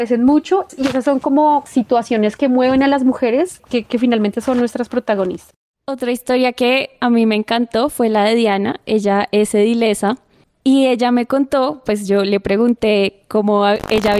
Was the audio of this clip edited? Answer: no; 0 cuts

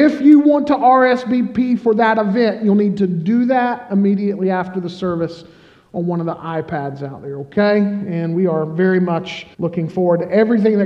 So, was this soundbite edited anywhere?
yes; 1 cut; at 9.5 s

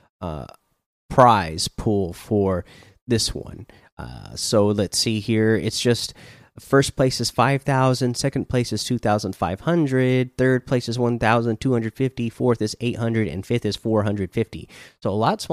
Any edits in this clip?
no; 0 cuts

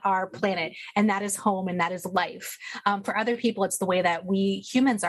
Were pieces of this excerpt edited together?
no; 0 cuts

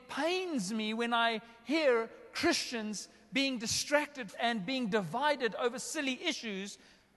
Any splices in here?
yes; 1 cut; at 4.3 s

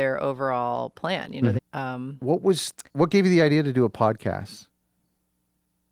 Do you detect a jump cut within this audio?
yes; 2 cuts; at 1.6 s, 2.9 s

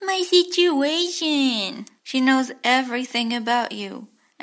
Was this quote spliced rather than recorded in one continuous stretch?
yes; 1 cut; at 2.0 s

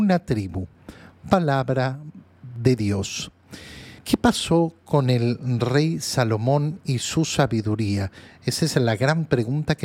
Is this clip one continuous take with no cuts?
no; 1 cut; at 4.0 s

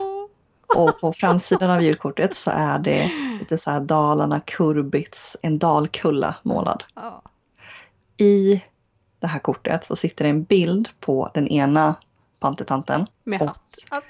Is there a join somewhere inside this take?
yes; 1 cut; at 13.1 s

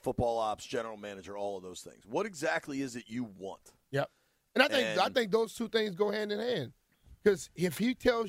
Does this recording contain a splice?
no; 0 cuts

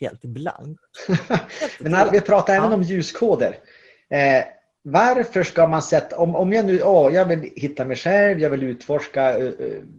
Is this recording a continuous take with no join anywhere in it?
no; 1 cut; at 2.1 s

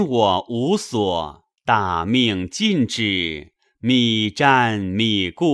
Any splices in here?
yes; 1 cut; at 1.6 s

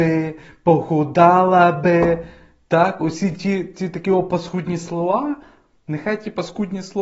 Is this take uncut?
yes; 0 cuts

